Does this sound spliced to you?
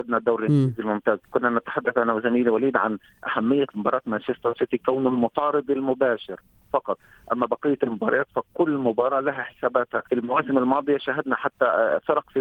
yes; 2 cuts; at 1.2 s, 10.1 s

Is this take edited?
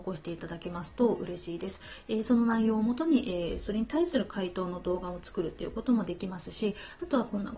no; 0 cuts

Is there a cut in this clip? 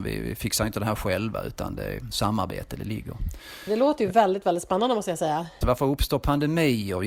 yes; 1 cut; at 5.6 s

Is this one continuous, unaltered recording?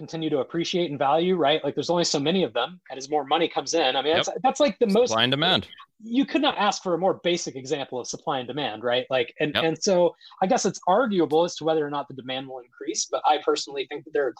yes; 0 cuts

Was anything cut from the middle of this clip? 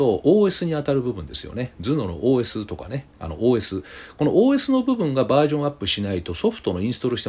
no; 0 cuts

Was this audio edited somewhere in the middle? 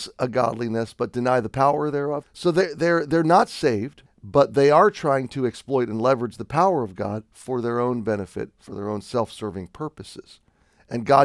yes; 2 cuts; at 2.2 s, 4.1 s

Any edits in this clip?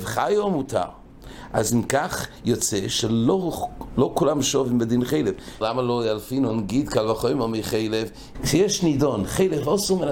yes; 2 cuts; at 5.6 s, 8.3 s

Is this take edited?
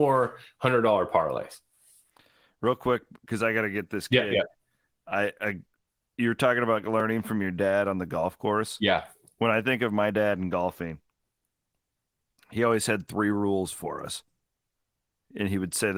no; 0 cuts

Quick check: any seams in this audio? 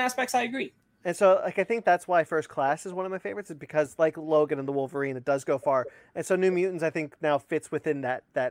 no; 0 cuts

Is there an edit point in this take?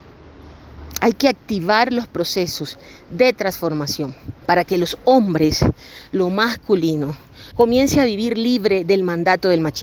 yes; 2 cuts; at 4.4 s, 7.5 s

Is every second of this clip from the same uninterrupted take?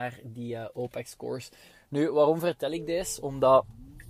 yes; 0 cuts

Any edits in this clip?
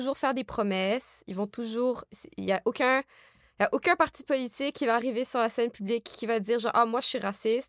no; 0 cuts

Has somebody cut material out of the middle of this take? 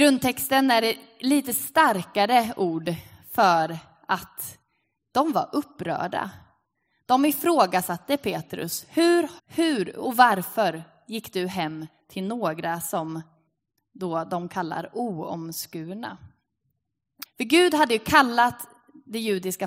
yes; 2 cuts; at 9.4 s, 17.2 s

